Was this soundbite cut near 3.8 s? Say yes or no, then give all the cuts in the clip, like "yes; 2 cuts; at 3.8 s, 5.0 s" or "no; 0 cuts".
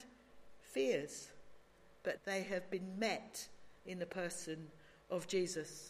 yes; 2 cuts; at 2.2 s, 3.8 s